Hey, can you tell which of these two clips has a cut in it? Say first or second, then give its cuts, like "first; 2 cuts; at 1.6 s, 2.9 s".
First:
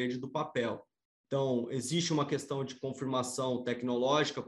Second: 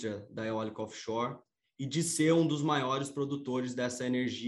first; 1 cut; at 1.1 s